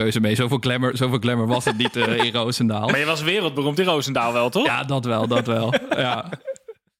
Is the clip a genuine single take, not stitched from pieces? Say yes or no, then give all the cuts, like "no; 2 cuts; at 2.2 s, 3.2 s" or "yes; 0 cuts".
yes; 0 cuts